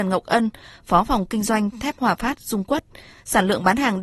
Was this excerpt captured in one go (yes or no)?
yes